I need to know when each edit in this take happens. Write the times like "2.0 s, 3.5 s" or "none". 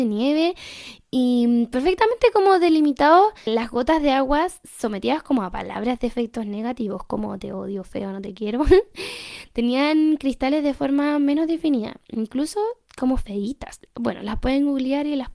3.5 s